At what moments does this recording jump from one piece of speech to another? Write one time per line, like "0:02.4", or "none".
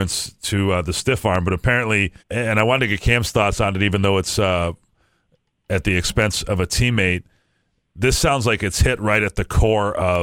0:02.2